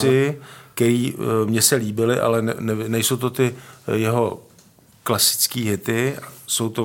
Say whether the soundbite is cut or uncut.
uncut